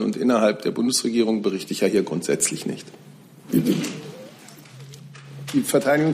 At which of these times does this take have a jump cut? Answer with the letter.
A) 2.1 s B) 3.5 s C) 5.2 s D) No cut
B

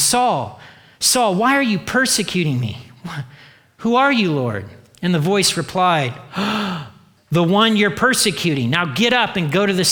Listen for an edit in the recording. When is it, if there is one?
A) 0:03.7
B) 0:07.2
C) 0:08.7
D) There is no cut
B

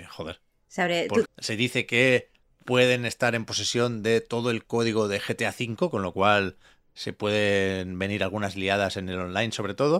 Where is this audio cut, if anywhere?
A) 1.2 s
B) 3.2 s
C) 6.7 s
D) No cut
A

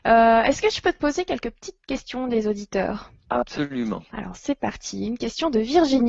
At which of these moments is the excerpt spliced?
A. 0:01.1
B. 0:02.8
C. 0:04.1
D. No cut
C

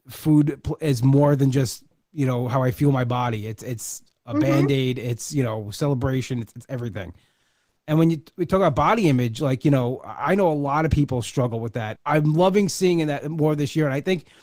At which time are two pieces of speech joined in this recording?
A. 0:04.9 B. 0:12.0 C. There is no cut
B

